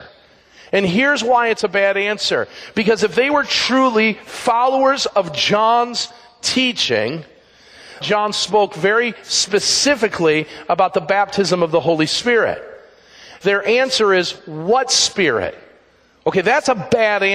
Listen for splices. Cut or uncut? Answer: cut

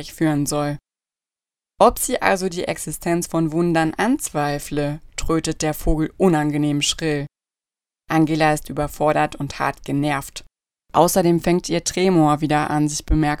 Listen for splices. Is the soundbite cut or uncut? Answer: uncut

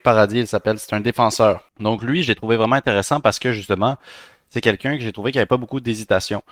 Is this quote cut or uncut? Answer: cut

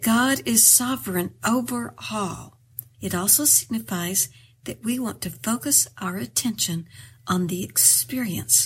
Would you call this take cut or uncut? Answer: cut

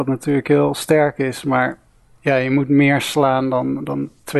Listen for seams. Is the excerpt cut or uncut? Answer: uncut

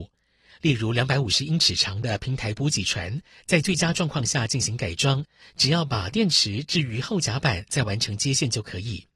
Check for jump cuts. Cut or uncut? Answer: uncut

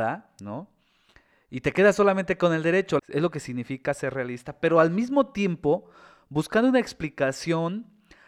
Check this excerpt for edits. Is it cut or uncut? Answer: cut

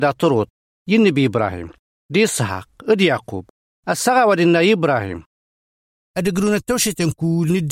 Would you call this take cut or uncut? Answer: uncut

